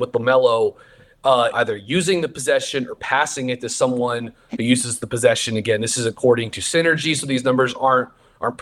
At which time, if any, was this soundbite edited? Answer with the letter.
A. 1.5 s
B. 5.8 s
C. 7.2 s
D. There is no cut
A